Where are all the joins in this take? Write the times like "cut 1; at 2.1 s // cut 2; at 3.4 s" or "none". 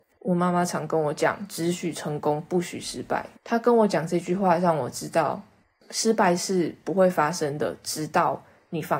cut 1; at 3.4 s